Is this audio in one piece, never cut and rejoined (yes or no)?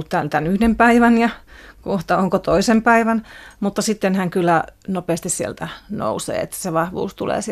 yes